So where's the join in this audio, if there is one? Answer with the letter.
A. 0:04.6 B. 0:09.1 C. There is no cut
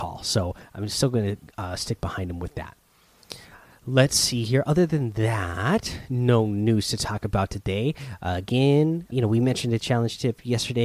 B